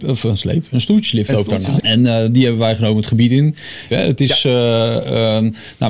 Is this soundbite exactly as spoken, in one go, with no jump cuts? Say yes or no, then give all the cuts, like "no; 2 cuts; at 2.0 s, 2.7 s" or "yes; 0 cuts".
no; 2 cuts; at 1.8 s, 3.9 s